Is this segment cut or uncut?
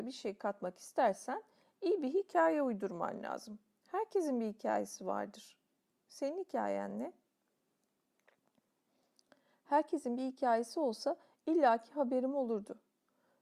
uncut